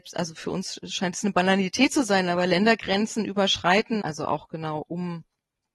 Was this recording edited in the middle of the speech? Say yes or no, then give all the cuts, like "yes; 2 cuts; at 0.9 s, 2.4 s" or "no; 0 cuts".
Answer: yes; 1 cut; at 4.0 s